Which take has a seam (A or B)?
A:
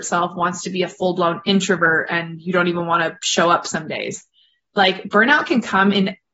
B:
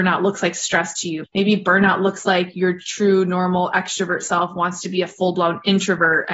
B